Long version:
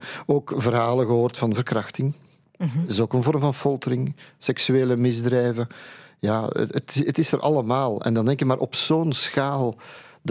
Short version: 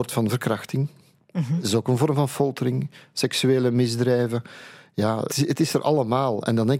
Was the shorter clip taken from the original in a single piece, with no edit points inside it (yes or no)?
no